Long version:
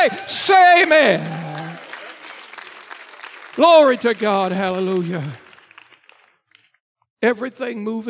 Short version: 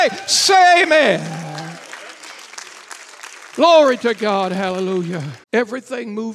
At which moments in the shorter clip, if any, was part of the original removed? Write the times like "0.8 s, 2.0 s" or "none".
5.4 s